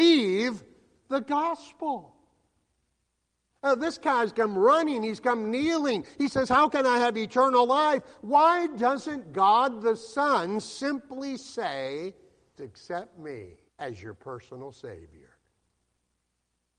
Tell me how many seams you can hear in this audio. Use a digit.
2